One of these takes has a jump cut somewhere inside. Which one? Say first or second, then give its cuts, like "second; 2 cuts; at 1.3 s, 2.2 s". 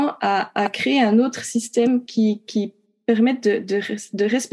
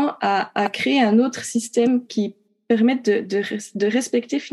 second; 1 cut; at 2.1 s